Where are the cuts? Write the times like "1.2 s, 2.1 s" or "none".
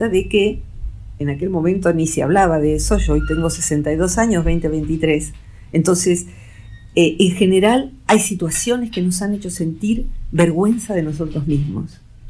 none